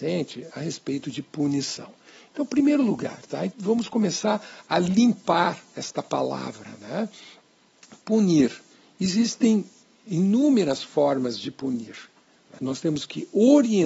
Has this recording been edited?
yes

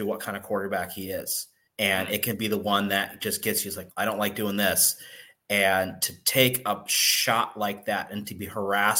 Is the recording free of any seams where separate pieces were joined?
no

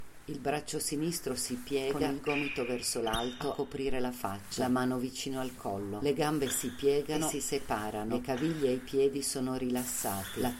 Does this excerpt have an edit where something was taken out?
no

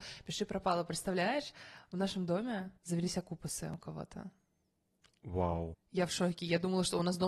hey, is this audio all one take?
no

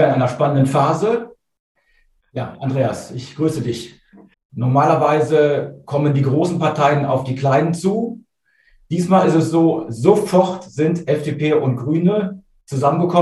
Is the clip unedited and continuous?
no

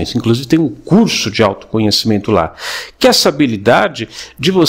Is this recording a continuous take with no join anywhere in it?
yes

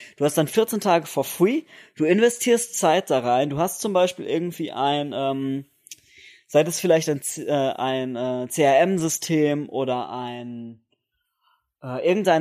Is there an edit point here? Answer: no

